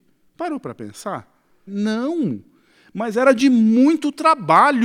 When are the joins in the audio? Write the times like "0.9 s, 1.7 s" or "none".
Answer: 1.7 s